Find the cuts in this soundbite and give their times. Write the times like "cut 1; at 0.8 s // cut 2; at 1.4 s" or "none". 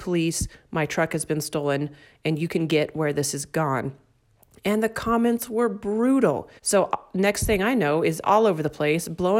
cut 1; at 6.6 s